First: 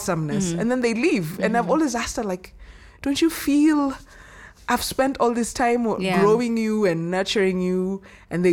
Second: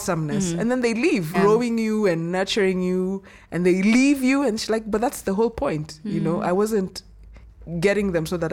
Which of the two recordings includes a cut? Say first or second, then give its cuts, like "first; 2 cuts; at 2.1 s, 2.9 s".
second; 1 cut; at 1.3 s